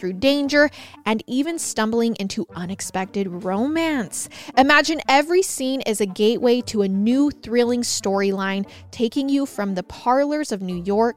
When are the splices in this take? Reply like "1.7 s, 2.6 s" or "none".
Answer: none